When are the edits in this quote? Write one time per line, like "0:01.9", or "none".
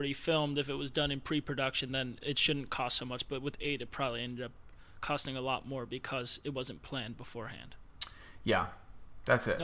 none